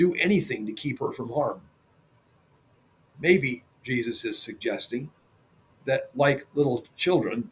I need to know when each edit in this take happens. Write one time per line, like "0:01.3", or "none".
none